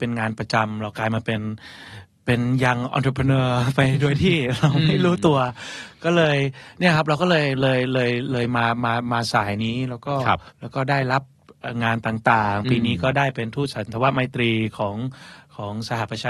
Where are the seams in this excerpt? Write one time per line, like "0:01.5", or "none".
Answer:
0:10.5